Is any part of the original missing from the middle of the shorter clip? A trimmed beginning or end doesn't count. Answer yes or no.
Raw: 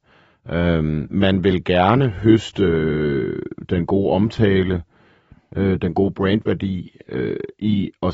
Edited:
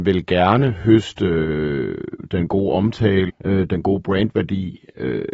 yes